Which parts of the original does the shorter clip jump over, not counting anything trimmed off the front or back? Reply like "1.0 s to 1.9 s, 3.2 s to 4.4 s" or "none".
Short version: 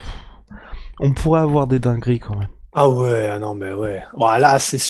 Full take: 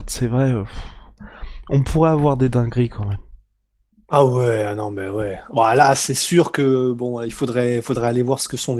3.4 s to 4.0 s